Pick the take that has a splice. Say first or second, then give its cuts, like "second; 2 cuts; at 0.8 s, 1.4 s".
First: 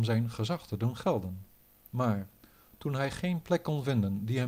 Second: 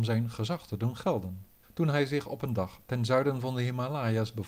second; 1 cut; at 1.6 s